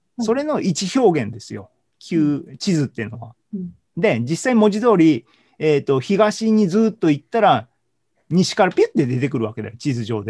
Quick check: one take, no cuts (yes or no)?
yes